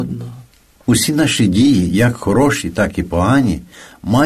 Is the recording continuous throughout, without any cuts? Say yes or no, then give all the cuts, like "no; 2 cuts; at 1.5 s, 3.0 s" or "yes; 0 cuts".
yes; 0 cuts